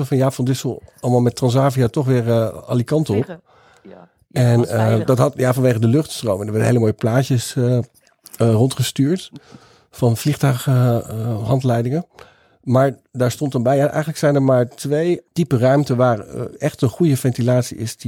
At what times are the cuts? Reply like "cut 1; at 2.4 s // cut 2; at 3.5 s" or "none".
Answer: none